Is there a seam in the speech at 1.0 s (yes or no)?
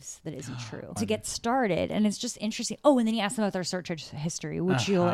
yes